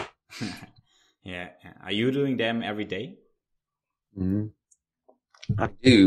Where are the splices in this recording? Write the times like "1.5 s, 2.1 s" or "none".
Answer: none